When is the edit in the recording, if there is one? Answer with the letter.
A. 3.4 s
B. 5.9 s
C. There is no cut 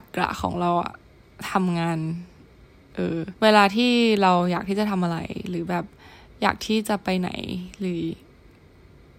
A